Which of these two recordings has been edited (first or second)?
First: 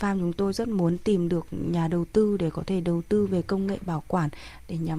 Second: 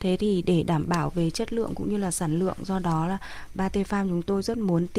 second